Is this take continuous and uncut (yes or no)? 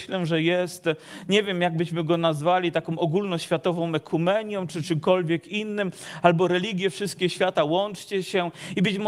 yes